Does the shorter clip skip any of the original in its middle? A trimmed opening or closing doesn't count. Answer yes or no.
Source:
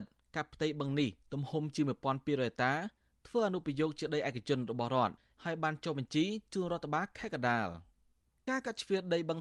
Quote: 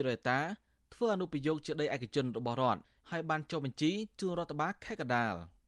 no